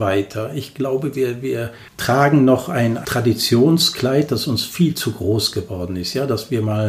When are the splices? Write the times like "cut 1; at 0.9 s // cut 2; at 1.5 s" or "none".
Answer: cut 1; at 1.9 s